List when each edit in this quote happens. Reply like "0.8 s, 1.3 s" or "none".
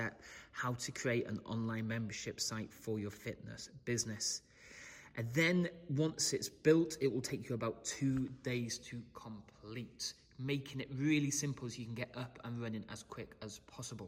none